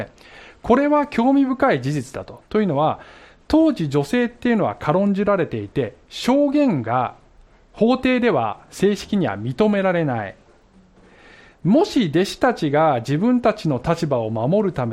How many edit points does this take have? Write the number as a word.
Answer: zero